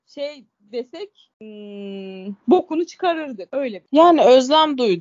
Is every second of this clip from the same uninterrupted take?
no; 2 cuts; at 1.3 s, 2.4 s

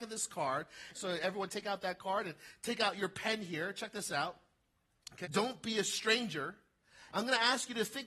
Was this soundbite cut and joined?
yes; 3 cuts; at 0.9 s, 5.2 s, 7.1 s

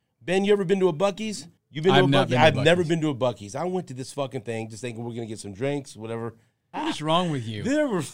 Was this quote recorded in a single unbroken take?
no; 2 cuts; at 1.6 s, 6.7 s

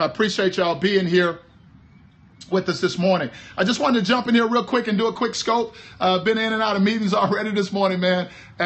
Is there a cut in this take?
yes; 1 cut; at 2.5 s

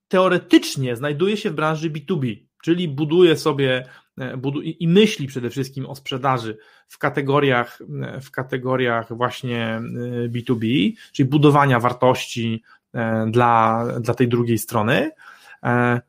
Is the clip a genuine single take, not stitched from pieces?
yes; 0 cuts

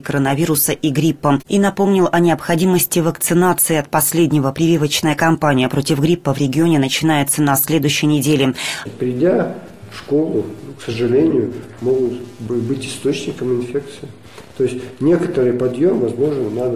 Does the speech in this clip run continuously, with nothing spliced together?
no; 1 cut; at 8.9 s

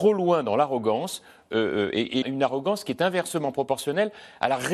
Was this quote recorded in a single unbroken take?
no; 1 cut; at 2.2 s

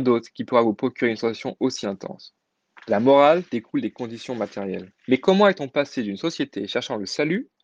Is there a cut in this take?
yes; 2 cuts; at 2.8 s, 5.0 s

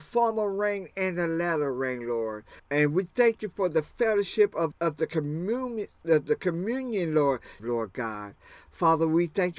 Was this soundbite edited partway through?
yes; 3 cuts; at 2.6 s, 4.7 s, 7.6 s

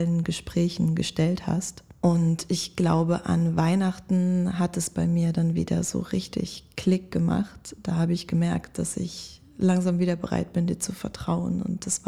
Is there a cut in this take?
no; 0 cuts

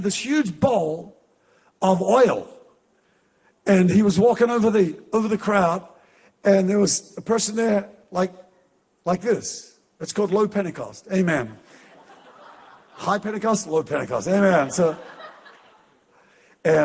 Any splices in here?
no; 0 cuts

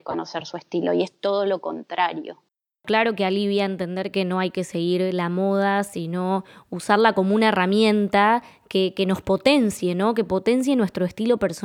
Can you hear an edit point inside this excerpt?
no; 0 cuts

